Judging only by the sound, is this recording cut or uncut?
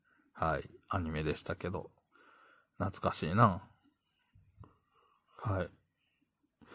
uncut